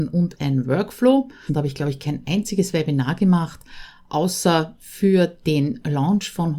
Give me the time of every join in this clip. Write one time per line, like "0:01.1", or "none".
0:01.5